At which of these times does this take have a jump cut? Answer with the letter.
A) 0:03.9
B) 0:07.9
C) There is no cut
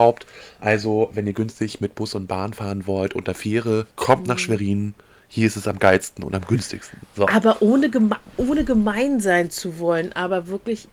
A